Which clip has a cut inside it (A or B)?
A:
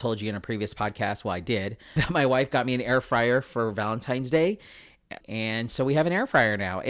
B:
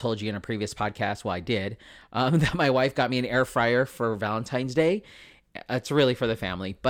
A